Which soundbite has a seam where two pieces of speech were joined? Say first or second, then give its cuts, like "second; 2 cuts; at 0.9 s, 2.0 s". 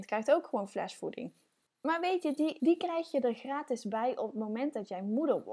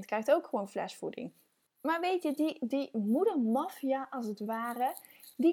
first; 1 cut; at 2.6 s